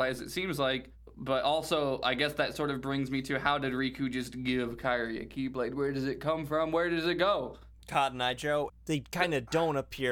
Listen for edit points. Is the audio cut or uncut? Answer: cut